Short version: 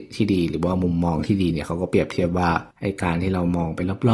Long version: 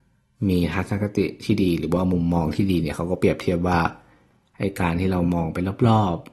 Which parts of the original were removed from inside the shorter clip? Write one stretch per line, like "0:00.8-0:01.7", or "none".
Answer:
0:04.0-0:04.5